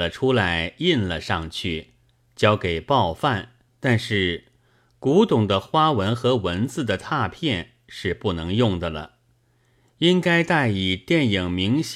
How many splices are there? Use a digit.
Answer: 1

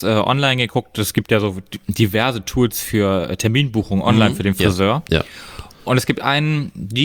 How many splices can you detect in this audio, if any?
0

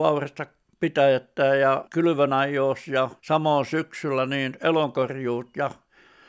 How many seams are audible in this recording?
2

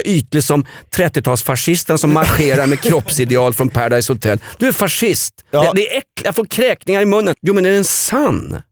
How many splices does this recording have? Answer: 1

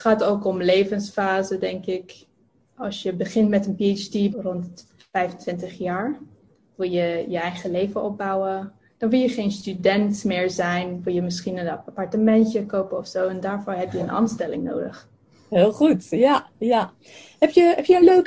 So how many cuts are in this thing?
1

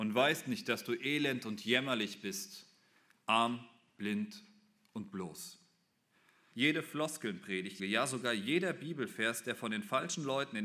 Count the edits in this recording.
2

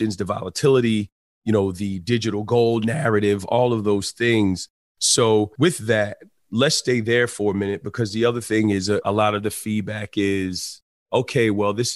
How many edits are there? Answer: 0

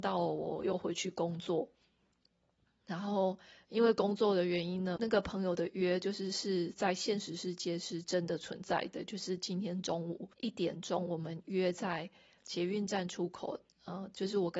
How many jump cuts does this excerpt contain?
2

